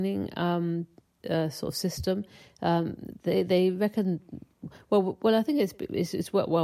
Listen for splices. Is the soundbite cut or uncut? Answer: uncut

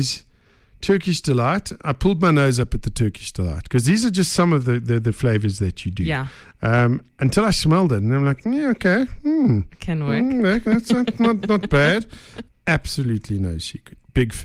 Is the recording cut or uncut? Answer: cut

